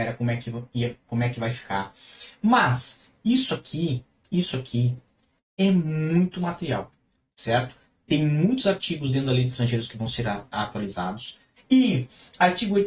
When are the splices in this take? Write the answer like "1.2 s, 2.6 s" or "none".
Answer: 11.6 s

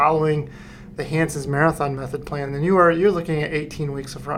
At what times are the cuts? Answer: none

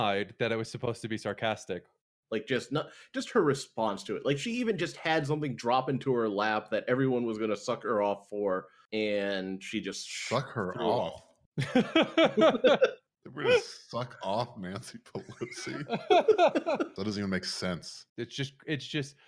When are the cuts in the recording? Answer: 17.0 s, 18.1 s

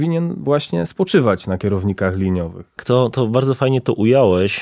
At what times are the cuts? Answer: 2.8 s

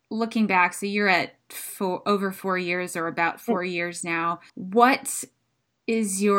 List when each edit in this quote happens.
4.5 s

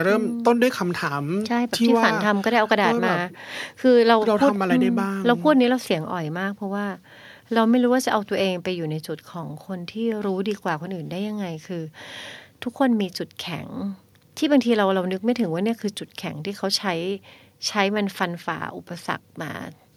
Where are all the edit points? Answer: none

